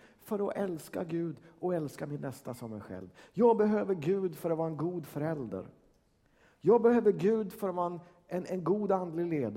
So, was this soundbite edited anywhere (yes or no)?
no